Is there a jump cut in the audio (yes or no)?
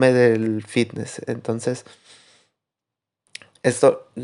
no